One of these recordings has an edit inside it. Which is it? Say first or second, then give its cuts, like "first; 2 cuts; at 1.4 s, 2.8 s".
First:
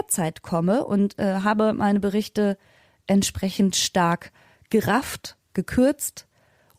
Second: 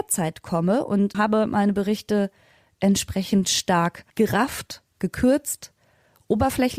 second; 2 cuts; at 1.1 s, 4.1 s